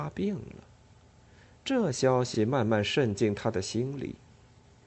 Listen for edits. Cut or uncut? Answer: uncut